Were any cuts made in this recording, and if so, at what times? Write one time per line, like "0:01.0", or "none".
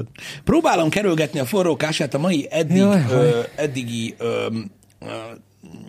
none